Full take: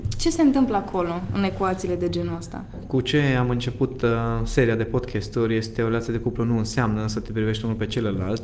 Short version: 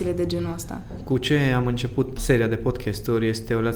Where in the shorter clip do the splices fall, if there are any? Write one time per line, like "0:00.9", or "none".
0:02.2